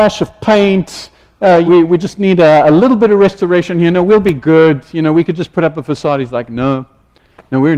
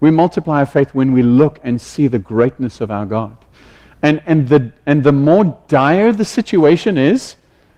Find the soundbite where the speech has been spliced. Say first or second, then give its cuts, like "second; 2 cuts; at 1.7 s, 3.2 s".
first; 1 cut; at 1.7 s